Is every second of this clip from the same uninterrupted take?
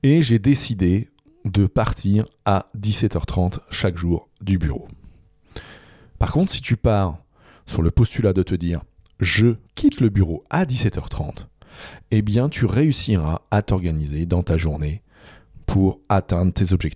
no; 2 cuts; at 6.2 s, 9.7 s

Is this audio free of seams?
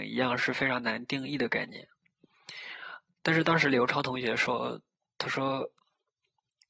yes; 0 cuts

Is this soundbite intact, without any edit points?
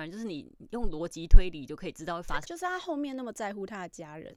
no; 1 cut; at 2.4 s

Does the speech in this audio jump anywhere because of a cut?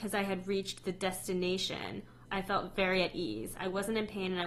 yes; 1 cut; at 2.3 s

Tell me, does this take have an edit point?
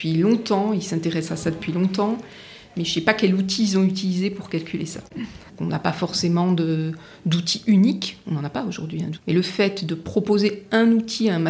yes; 2 cuts; at 5.5 s, 9.2 s

